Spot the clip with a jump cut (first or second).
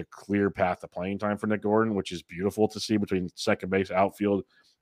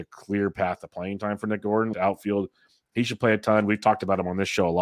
second